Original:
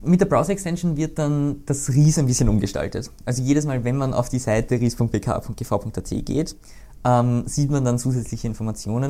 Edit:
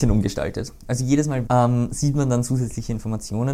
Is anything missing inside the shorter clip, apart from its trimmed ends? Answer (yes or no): yes